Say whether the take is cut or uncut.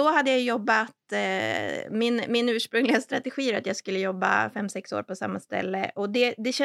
uncut